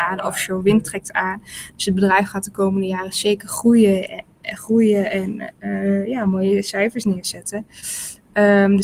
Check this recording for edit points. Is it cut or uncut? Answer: uncut